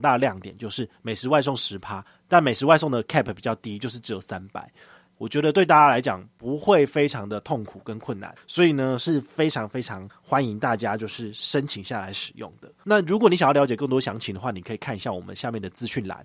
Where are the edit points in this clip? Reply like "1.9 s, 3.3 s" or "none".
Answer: 5.1 s, 8.4 s